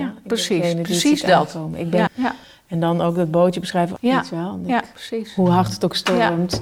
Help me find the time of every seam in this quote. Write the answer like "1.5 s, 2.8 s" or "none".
2.1 s, 4.0 s

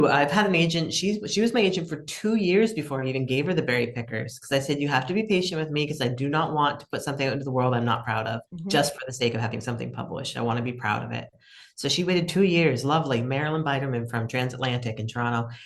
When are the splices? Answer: 8.5 s

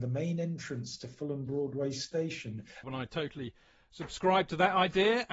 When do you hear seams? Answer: 2.8 s

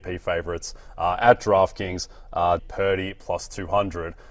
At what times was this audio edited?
2.6 s

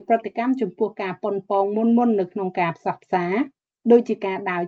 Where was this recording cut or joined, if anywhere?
none

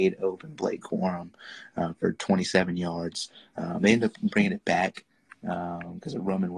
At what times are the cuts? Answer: none

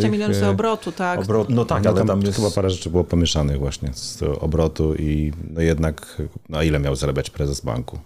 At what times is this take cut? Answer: none

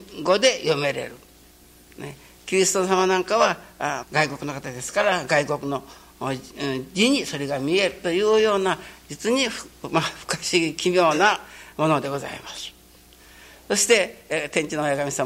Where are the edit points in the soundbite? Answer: 4.0 s

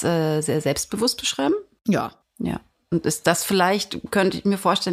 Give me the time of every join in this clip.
none

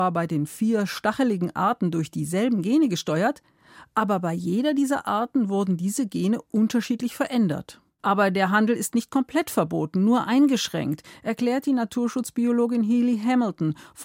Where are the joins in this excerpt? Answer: 8.0 s

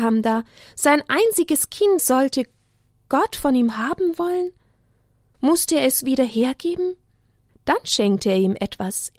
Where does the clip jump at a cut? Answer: 2.0 s, 5.3 s, 7.5 s

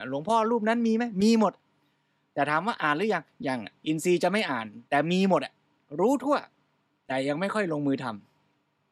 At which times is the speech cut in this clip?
3.8 s, 4.9 s

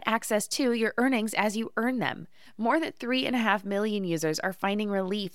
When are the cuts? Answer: 2.5 s

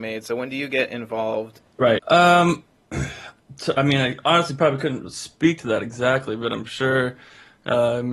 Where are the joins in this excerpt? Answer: 2.0 s

